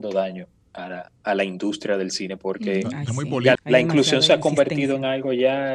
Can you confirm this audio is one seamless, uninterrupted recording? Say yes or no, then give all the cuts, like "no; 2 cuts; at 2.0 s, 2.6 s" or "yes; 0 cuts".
no; 1 cut; at 3.6 s